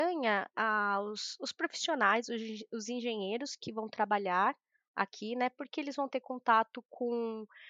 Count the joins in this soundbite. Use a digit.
0